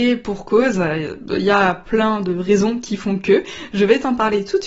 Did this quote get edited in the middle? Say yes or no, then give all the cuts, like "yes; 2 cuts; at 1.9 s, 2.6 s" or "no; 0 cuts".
no; 0 cuts